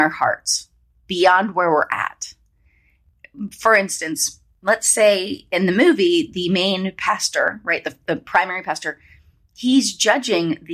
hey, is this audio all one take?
yes; 0 cuts

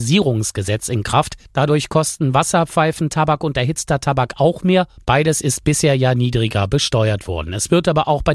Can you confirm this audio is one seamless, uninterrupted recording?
yes; 0 cuts

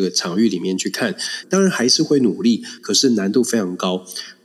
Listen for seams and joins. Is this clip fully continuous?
no; 2 cuts; at 1.4 s, 2.8 s

